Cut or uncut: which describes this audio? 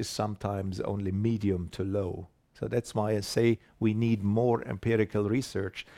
uncut